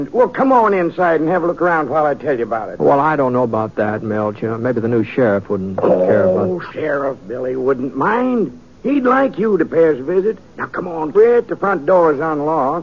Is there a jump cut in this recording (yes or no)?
yes